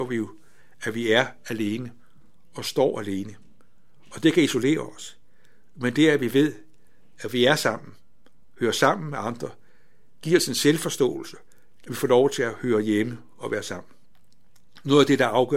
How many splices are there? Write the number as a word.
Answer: two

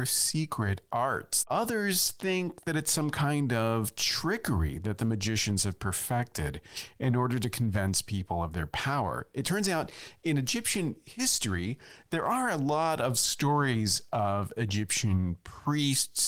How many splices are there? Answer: one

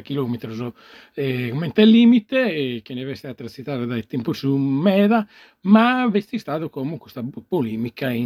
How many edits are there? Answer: zero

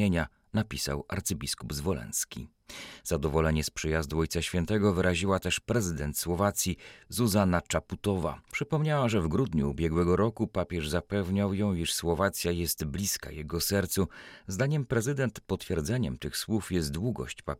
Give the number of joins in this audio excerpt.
zero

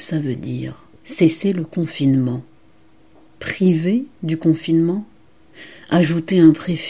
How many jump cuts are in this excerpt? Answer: one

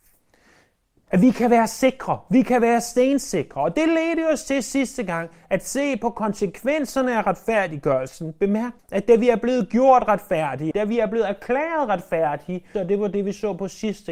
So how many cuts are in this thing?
three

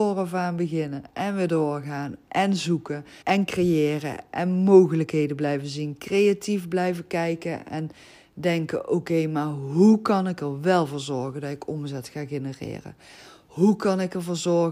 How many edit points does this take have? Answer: one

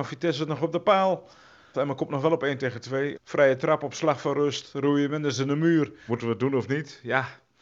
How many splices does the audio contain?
three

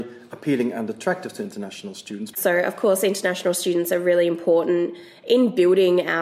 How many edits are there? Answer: one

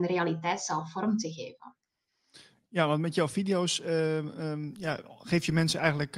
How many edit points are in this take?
zero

